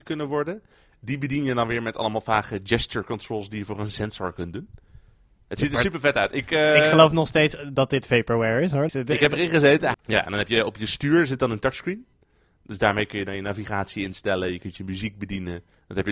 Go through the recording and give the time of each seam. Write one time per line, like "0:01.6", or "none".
0:08.9
0:09.9